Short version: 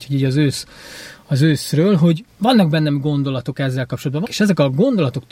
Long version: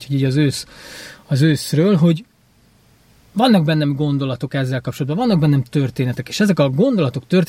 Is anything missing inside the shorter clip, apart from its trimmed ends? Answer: yes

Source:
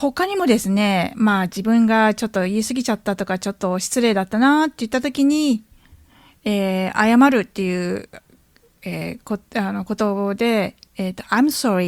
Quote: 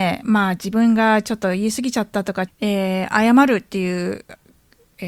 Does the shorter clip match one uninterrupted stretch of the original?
no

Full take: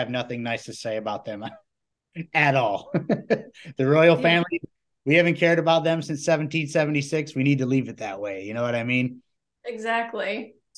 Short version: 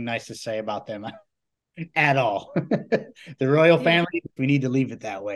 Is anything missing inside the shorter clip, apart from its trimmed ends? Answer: yes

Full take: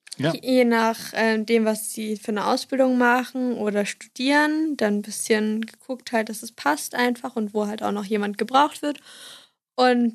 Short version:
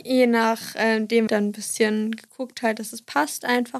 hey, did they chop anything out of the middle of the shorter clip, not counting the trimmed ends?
yes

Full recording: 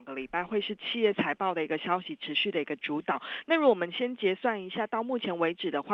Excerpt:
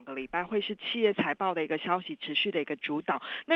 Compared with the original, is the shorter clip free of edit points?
yes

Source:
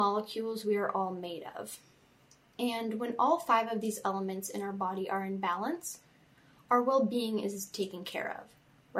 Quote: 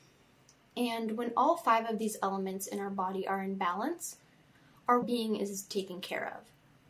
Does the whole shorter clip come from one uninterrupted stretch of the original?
no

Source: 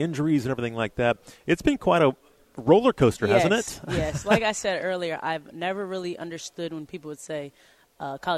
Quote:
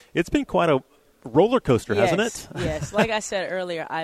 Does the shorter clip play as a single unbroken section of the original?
yes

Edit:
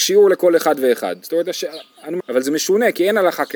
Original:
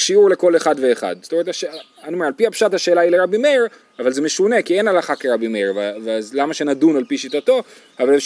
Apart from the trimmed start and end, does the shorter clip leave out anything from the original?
yes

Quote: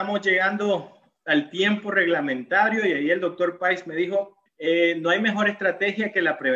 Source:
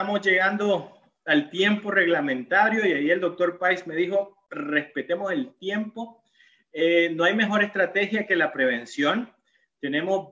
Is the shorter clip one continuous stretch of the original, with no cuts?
no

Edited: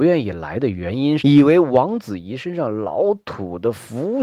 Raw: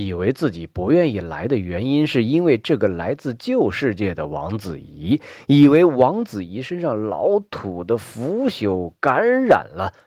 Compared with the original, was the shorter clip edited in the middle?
yes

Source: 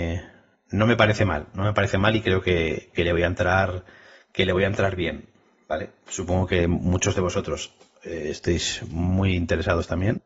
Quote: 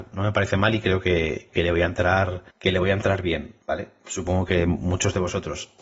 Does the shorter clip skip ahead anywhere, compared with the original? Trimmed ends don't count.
yes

